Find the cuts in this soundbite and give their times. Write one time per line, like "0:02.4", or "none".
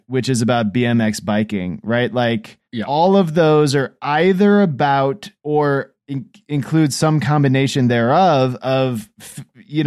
0:02.6
0:05.4